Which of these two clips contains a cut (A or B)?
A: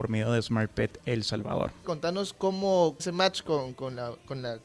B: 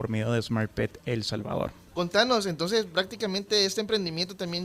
A